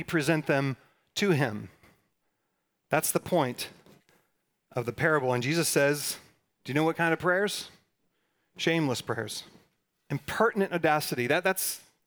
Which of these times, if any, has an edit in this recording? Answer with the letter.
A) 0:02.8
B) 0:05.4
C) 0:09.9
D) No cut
C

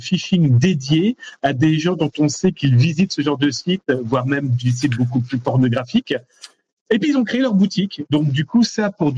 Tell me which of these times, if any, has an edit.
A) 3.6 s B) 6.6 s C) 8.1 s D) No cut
D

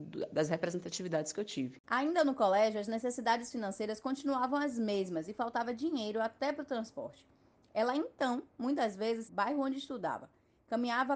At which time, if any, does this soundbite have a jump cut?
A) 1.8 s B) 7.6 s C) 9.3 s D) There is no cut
C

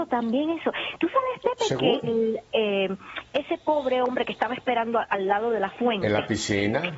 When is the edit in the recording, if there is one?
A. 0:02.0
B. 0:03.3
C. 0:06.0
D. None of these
A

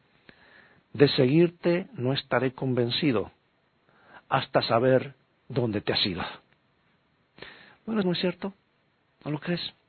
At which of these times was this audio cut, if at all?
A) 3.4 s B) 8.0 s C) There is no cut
B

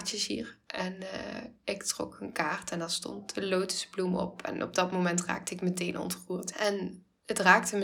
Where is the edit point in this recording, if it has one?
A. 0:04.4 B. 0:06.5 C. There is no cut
B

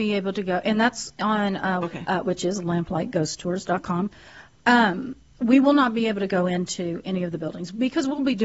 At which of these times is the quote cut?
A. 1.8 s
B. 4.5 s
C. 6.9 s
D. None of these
A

